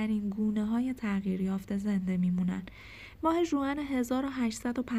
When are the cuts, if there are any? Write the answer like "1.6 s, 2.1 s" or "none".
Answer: 3.2 s